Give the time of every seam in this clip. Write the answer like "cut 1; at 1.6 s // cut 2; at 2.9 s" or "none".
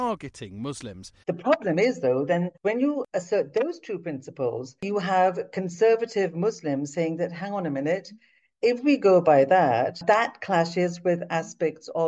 cut 1; at 1.2 s